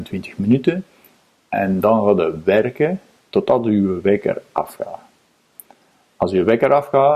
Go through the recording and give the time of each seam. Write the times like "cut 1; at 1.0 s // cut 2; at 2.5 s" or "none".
cut 1; at 3.2 s